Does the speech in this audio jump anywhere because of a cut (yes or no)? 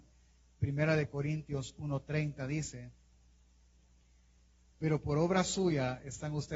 no